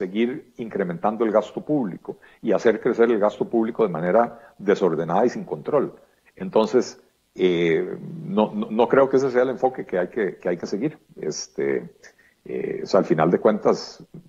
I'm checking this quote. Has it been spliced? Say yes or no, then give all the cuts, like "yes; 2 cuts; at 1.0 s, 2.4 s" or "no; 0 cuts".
no; 0 cuts